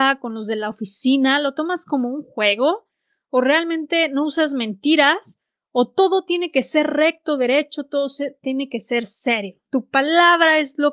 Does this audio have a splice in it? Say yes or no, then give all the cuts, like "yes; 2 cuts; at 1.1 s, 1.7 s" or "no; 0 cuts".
no; 0 cuts